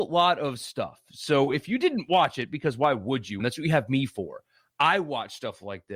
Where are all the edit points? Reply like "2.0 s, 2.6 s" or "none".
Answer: 3.4 s